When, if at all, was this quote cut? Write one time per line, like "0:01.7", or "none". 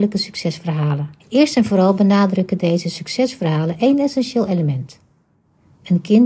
0:01.2

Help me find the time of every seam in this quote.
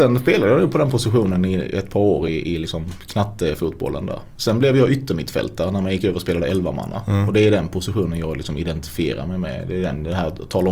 none

